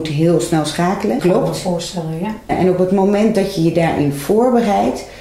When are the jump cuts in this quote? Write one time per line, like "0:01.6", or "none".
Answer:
0:01.2
0:02.5